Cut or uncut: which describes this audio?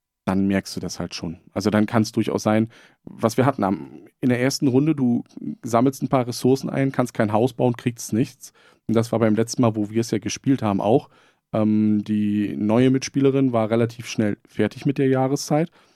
uncut